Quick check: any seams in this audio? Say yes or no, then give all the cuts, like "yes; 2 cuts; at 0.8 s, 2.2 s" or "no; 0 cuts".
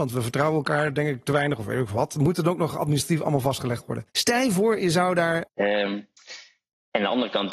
yes; 2 cuts; at 4.1 s, 5.5 s